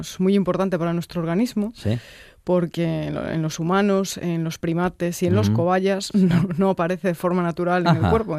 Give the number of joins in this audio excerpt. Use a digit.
0